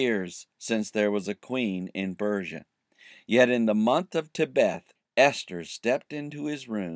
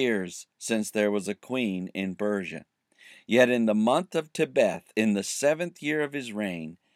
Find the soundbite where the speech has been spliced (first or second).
first